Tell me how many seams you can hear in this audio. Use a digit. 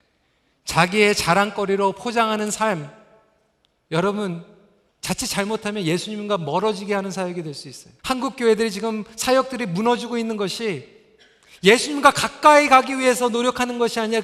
2